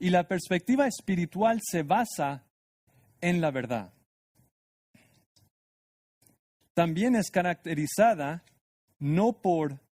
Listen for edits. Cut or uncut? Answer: uncut